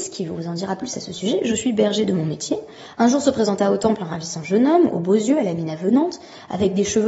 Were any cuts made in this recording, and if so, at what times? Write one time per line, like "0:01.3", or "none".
0:02.9

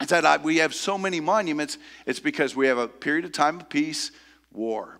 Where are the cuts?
none

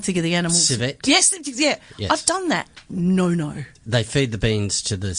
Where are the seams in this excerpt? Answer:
0:03.7

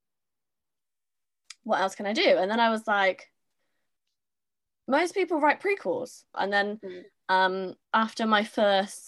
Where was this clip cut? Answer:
0:06.3
0:07.8

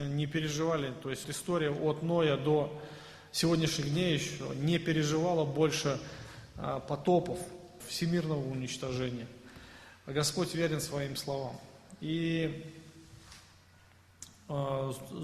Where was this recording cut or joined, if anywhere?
0:01.2
0:07.8

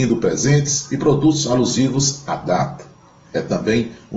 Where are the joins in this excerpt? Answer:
0:03.3

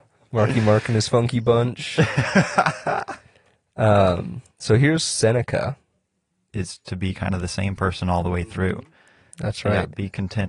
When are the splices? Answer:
0:06.5

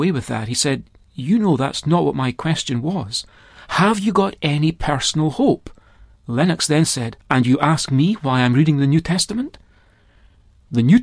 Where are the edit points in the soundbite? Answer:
0:06.1
0:07.2

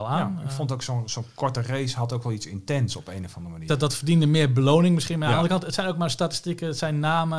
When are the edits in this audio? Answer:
0:03.7

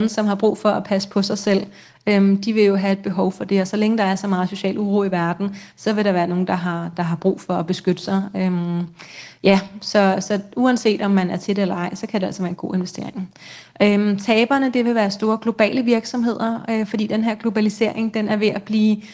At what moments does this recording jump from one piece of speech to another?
none

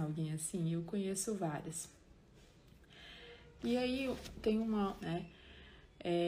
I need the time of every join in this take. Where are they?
0:03.6
0:05.0

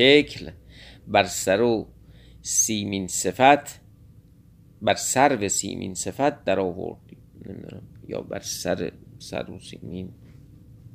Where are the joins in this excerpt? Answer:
none

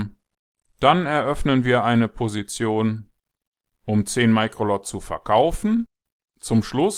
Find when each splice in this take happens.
none

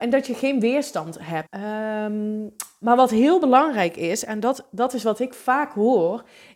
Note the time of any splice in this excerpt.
0:01.5

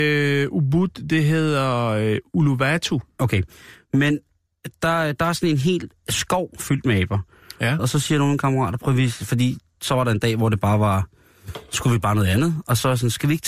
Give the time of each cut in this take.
0:07.8

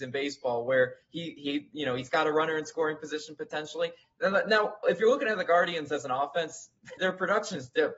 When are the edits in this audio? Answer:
0:04.0
0:07.0

